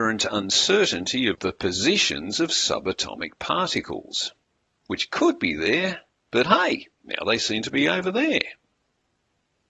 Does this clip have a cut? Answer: no; 0 cuts

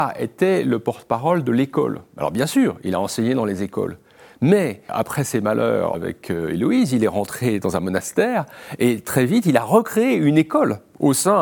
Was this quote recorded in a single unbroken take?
no; 2 cuts; at 4.9 s, 5.9 s

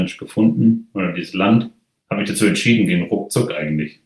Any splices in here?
no; 0 cuts

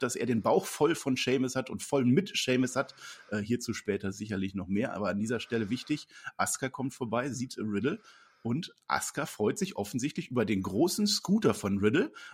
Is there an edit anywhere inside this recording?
no; 0 cuts

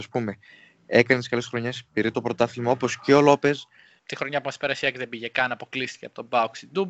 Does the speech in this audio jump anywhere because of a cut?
yes; 1 cut; at 4.0 s

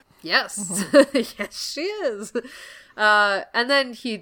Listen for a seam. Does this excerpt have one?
no; 0 cuts

